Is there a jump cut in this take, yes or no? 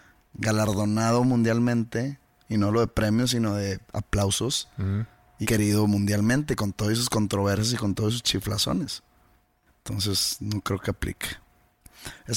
yes